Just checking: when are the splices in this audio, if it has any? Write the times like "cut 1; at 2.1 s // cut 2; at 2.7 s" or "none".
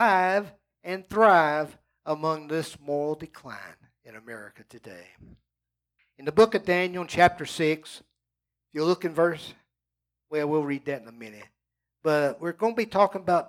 cut 1; at 6.0 s